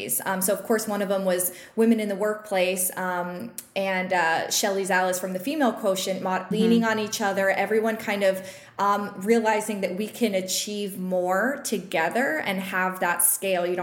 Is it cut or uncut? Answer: cut